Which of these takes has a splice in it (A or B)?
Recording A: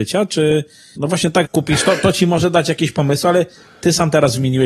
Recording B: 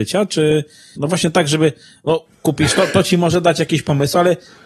A